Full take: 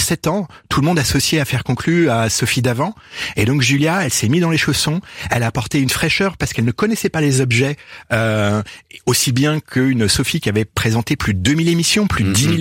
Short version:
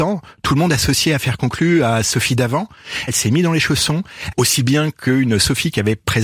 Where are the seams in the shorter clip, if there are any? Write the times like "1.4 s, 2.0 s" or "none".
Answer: 3.1 s, 4.3 s